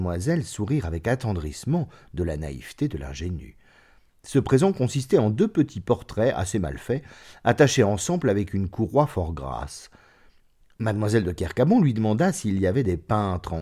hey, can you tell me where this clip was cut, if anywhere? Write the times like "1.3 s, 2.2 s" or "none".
none